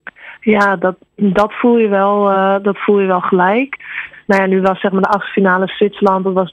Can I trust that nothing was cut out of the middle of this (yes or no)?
yes